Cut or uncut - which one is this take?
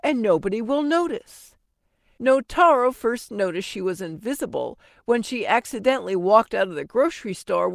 cut